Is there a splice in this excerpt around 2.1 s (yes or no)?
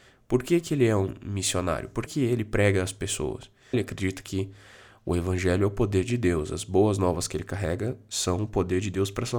yes